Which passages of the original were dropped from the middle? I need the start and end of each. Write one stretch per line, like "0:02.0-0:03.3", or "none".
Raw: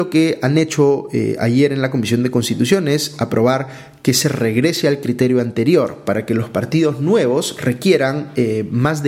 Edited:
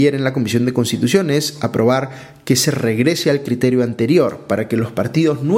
none